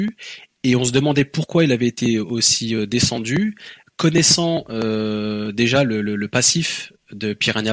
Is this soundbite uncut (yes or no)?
yes